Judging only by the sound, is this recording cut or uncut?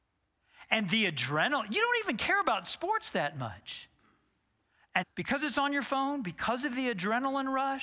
cut